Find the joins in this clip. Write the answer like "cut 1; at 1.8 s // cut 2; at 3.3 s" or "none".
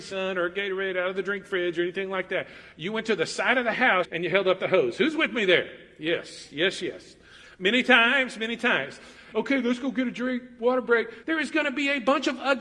cut 1; at 4.0 s // cut 2; at 9.3 s // cut 3; at 11.2 s